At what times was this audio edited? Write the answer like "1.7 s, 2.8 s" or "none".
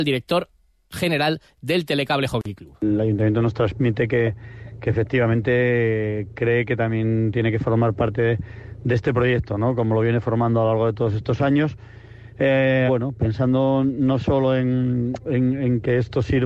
12.9 s